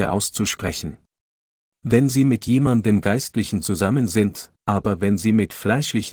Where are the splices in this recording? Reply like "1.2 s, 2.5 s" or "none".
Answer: 1.7 s, 4.6 s